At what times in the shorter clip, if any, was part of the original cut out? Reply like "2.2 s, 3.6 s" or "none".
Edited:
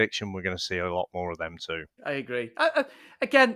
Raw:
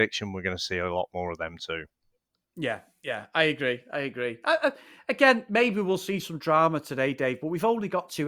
2.0 s